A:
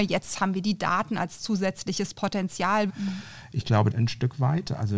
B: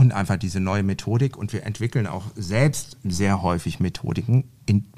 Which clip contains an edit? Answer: A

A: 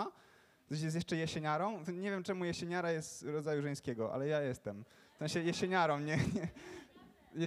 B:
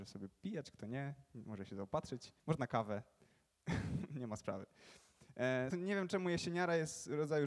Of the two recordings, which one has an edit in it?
B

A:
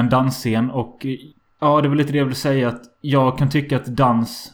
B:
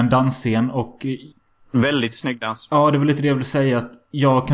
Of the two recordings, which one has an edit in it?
A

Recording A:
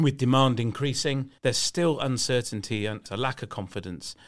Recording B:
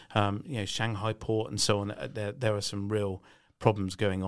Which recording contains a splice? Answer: A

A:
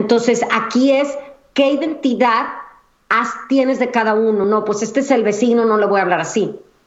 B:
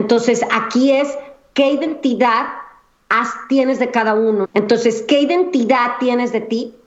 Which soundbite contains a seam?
B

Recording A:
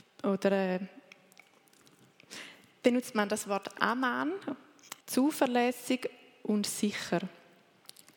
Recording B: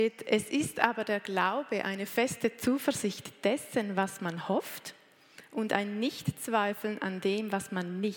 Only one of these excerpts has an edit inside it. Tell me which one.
A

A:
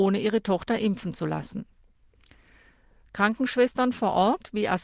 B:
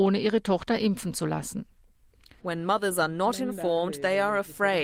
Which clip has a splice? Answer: B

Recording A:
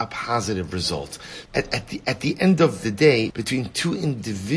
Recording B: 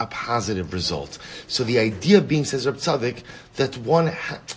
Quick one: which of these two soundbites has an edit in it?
A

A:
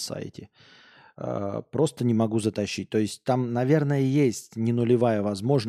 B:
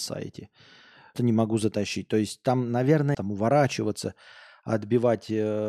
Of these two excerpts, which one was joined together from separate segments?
B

